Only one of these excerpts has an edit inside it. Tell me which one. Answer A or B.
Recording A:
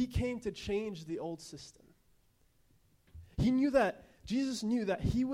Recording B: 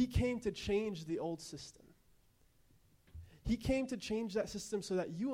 A